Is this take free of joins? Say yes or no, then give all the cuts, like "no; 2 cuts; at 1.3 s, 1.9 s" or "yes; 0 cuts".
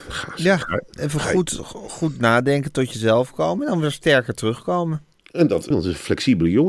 no; 1 cut; at 5.7 s